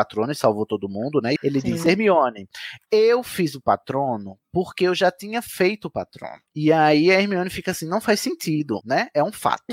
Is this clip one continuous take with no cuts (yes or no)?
no